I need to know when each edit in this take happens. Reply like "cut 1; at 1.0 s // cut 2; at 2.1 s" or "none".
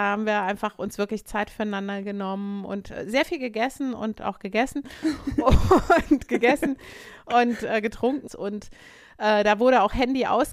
cut 1; at 8.3 s